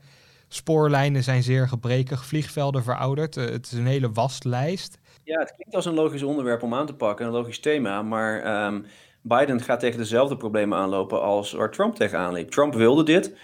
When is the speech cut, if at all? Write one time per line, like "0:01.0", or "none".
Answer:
none